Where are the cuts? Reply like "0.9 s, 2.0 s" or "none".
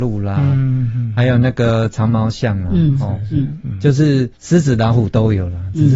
4.3 s